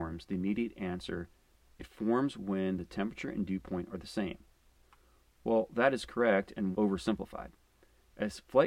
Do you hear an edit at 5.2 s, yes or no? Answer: no